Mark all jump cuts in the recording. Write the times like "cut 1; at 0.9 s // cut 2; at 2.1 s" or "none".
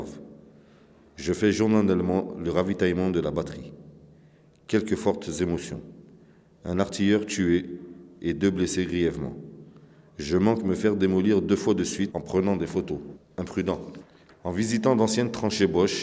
none